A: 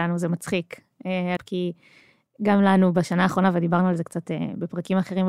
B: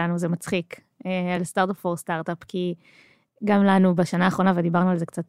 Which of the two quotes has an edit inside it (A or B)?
A